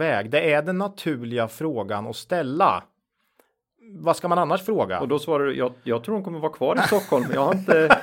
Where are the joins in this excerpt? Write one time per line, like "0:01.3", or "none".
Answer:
none

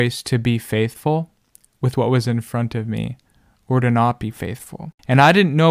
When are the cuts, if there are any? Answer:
none

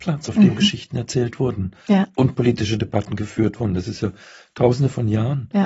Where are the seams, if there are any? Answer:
none

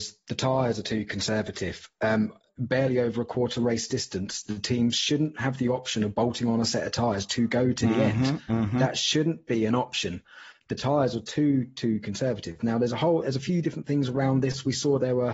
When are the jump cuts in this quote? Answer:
none

